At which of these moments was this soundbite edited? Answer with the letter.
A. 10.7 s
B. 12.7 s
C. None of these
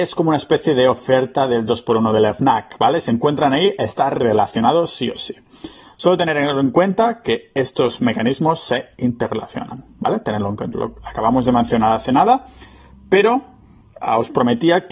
A